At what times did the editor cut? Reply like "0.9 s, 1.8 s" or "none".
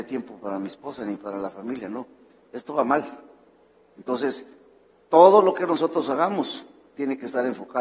none

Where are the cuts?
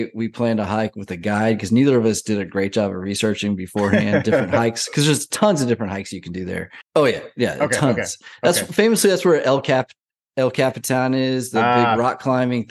6.8 s

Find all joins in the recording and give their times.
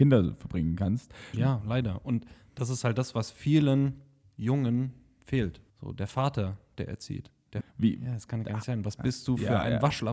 1.3 s, 5.7 s, 7.6 s

